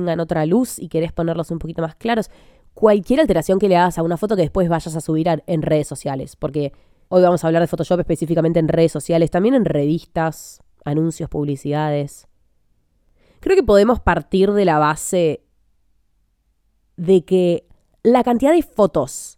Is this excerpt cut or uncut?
uncut